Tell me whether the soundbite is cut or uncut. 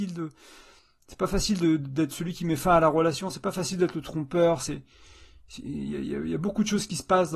uncut